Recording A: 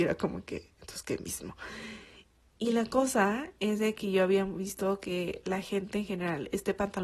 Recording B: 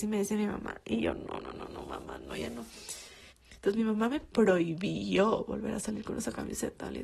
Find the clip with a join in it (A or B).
B